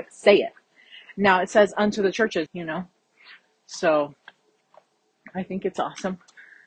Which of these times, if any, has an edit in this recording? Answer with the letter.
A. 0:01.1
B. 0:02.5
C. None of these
B